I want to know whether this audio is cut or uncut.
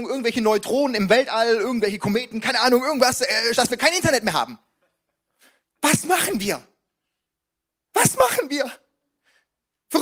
cut